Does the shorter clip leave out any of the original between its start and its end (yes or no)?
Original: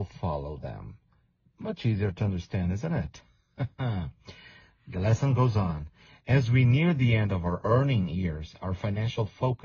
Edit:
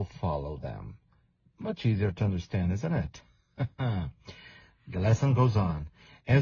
no